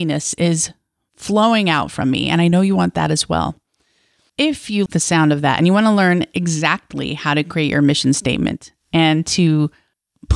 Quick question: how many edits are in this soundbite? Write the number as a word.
one